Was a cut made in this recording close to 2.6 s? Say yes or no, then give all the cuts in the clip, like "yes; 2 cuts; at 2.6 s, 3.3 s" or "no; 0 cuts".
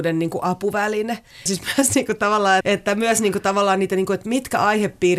yes; 2 cuts; at 1.5 s, 2.6 s